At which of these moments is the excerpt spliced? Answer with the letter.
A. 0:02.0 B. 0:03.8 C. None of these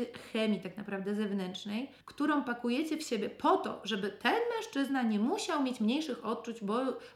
A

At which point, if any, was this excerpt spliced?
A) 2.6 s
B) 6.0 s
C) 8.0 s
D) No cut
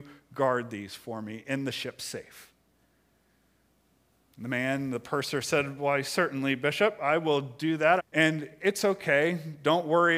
C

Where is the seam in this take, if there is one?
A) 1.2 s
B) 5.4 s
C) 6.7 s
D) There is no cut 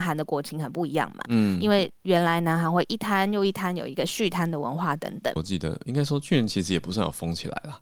B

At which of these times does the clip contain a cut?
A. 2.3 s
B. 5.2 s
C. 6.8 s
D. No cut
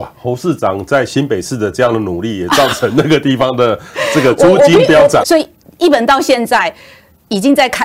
B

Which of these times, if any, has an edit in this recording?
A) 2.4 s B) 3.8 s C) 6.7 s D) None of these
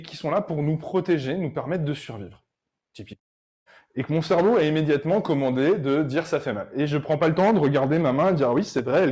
B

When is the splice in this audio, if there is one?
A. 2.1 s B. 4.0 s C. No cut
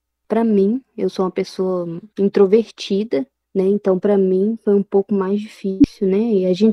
A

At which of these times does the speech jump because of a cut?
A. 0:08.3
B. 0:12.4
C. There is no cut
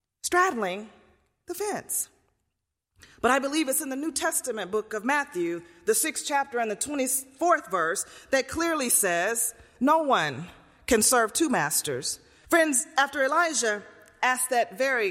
B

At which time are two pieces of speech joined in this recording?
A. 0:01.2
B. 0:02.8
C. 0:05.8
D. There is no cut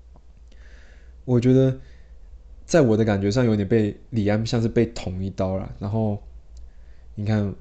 D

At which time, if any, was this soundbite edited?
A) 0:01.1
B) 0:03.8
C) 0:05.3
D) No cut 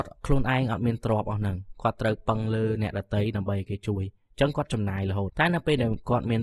C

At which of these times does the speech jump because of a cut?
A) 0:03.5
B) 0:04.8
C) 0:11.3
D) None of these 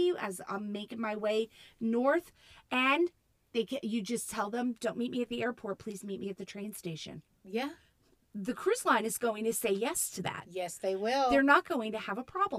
D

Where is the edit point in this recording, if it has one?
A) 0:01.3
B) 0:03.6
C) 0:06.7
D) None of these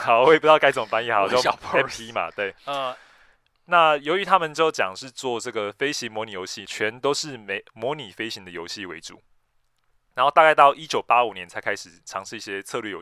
C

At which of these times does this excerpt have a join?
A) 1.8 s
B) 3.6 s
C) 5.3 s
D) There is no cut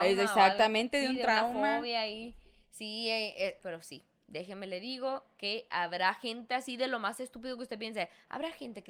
B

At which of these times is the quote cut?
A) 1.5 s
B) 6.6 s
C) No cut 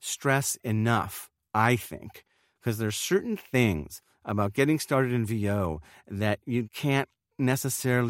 B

